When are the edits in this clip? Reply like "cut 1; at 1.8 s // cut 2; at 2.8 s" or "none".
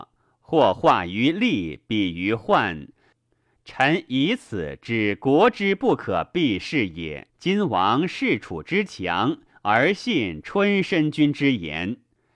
cut 1; at 7.3 s